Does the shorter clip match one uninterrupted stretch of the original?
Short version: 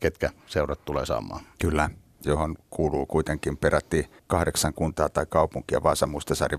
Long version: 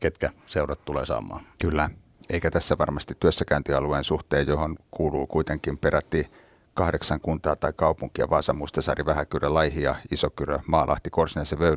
no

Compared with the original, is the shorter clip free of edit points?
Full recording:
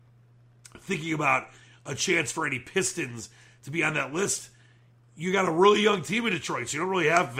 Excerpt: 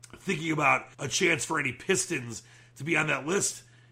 no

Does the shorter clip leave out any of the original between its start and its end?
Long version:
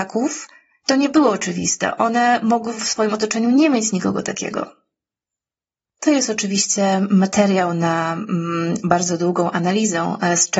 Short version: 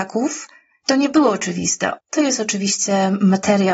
yes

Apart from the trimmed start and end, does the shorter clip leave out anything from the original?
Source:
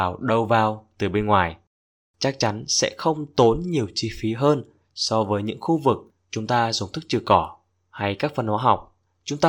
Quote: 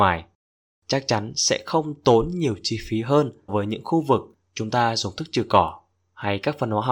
yes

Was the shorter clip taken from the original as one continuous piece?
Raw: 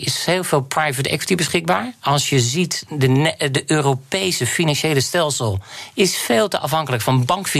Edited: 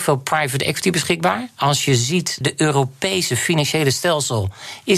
no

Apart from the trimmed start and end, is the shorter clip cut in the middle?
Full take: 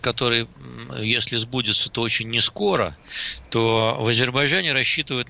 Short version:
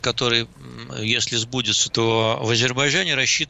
yes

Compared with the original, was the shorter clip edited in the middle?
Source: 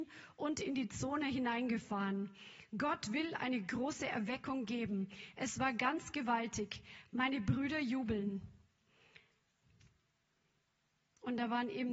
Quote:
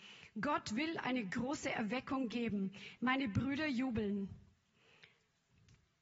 yes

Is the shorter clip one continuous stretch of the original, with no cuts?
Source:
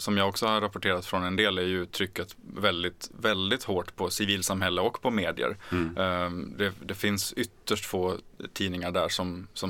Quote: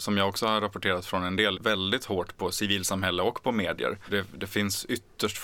no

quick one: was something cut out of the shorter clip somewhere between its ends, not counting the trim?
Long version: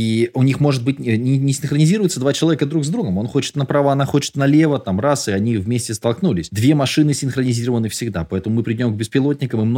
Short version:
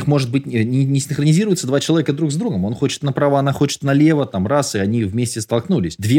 no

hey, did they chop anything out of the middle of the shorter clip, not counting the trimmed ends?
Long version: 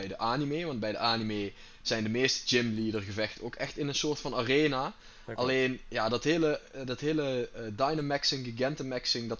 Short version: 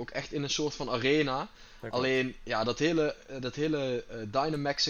no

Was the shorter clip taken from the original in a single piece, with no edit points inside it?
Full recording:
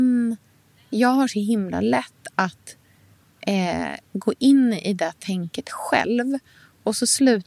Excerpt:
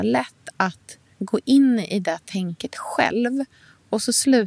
no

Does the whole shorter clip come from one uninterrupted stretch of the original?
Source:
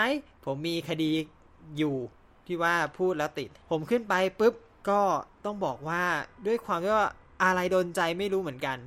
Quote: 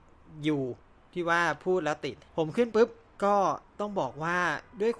no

